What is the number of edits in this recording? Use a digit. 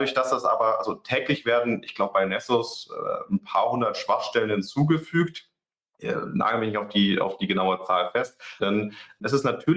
1